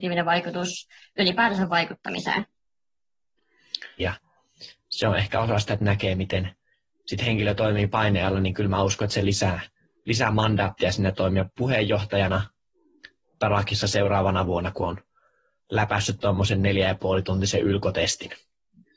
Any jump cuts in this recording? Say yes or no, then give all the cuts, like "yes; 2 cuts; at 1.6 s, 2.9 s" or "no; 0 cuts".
yes; 2 cuts; at 4.0 s, 11.5 s